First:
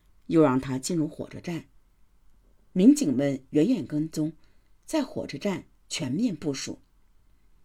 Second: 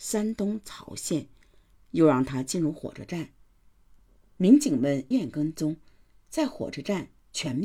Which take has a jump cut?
second; 1 cut; at 5.1 s

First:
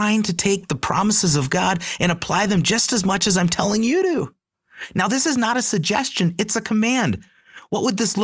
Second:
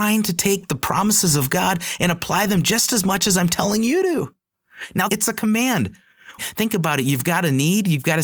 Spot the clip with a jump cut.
second; 2 cuts; at 5.1 s, 6.4 s

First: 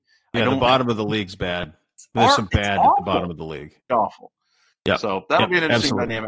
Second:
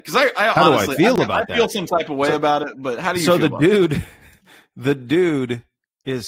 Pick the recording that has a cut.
first; 1 cut; at 3.9 s

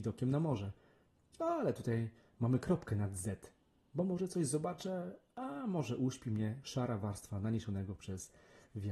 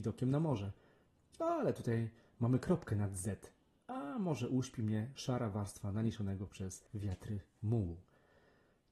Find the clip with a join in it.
second; 2 cuts; at 3.8 s, 6.9 s

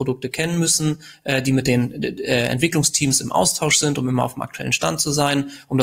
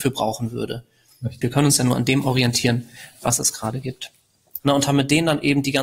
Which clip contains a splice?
second; 2 cuts; at 1.4 s, 4.6 s

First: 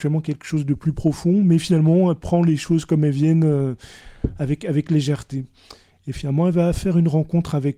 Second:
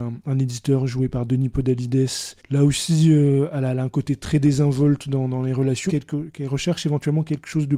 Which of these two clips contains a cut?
second; 2 cuts; at 2.4 s, 5.9 s

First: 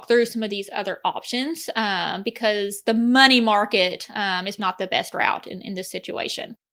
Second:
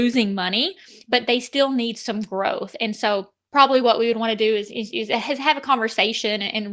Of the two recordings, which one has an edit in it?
first; 1 cut; at 4.6 s

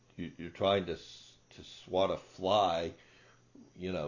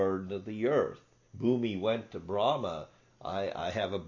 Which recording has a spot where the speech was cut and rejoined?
second; 1 cut; at 1.3 s

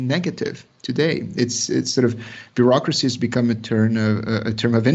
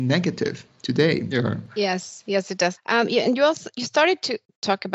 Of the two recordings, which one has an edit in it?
second; 2 cuts; at 1.3 s, 2.8 s

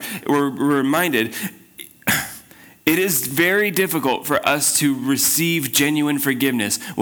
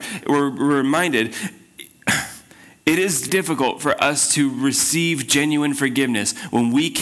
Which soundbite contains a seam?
second; 1 cut; at 3.3 s

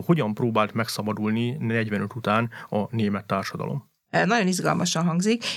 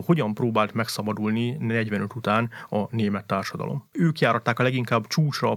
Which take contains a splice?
second; 1 cut; at 3.9 s

